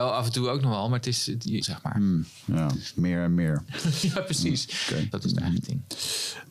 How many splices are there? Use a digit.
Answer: 2